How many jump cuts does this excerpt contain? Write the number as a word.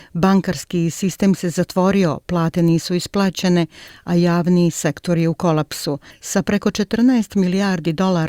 one